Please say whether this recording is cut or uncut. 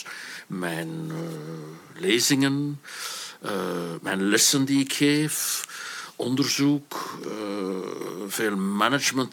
uncut